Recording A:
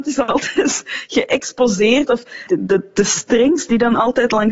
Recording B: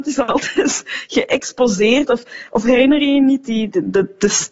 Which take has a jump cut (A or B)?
A